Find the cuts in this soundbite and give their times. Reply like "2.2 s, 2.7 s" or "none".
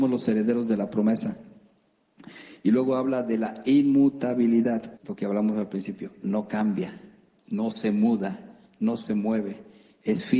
5.0 s